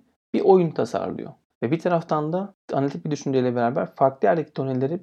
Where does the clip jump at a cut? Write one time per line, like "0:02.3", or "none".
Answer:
0:01.5